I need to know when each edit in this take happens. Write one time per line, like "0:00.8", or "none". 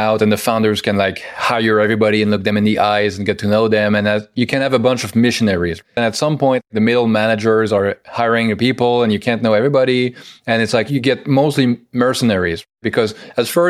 0:06.0